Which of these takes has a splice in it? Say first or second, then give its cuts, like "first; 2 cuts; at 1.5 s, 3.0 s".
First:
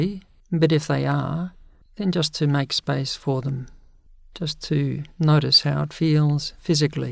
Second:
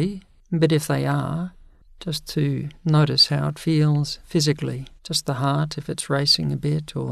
second; 2 cuts; at 1.9 s, 5.0 s